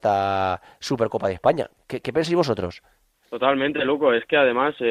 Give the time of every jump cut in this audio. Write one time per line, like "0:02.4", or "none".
none